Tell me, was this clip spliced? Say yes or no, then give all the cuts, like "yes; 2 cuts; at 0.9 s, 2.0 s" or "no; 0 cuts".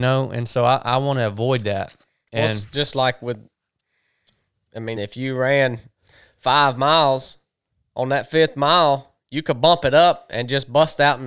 yes; 1 cut; at 4.9 s